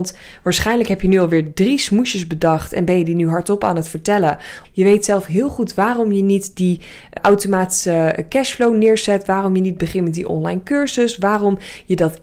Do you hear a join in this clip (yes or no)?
yes